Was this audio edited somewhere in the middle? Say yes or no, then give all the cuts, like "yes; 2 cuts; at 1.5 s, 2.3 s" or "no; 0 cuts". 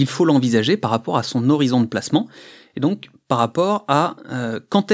no; 0 cuts